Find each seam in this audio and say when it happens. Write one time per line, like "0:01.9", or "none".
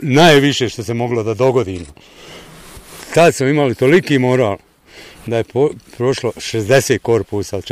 none